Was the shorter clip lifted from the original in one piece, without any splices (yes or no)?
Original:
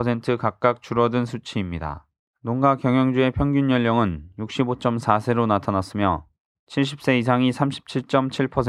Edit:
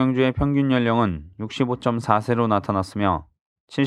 yes